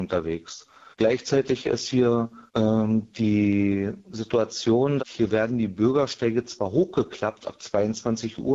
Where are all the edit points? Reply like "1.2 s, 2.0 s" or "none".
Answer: 0.9 s, 2.5 s, 5.0 s